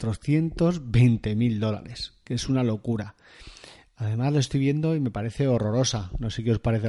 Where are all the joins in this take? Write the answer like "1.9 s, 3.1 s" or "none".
none